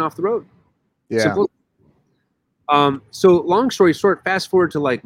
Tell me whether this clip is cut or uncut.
uncut